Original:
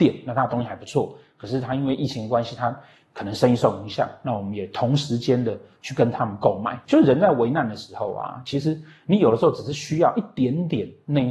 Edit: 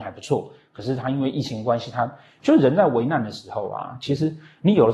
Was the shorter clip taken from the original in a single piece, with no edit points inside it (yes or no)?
no